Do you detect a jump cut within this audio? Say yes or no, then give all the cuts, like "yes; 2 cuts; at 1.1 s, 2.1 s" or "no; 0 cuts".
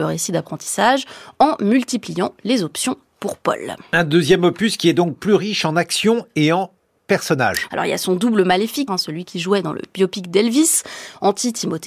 yes; 2 cuts; at 7.7 s, 8.9 s